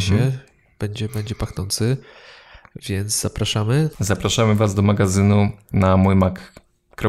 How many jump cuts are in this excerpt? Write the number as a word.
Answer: two